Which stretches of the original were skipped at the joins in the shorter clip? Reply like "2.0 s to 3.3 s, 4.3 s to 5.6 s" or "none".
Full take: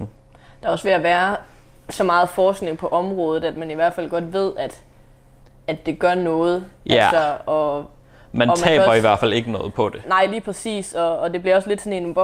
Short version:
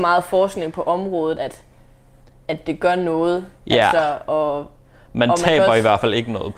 3.4 s to 4.5 s